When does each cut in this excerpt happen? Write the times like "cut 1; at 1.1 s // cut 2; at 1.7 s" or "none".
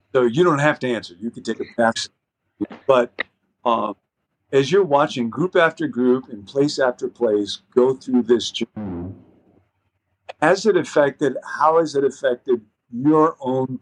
cut 1; at 2.8 s